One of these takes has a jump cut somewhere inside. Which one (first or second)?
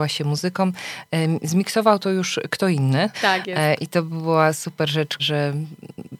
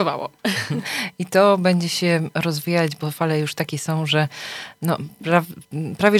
first